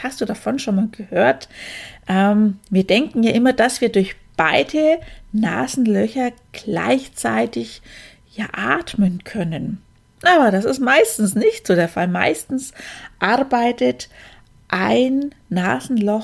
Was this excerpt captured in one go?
yes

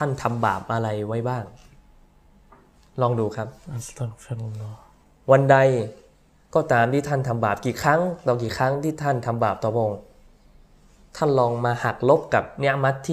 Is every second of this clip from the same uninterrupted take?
yes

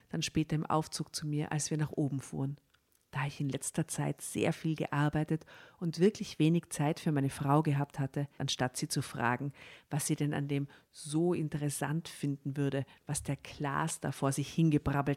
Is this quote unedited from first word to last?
no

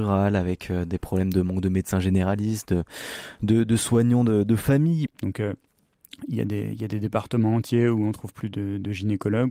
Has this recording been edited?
yes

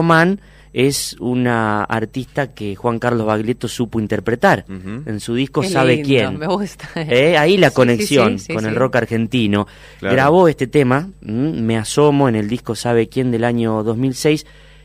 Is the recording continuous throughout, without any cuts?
yes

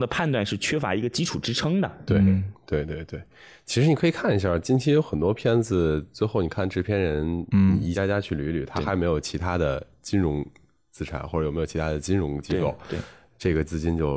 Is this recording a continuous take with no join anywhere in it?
yes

